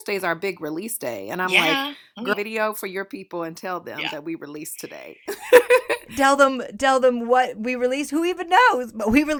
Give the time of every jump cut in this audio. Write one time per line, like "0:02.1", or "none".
0:02.3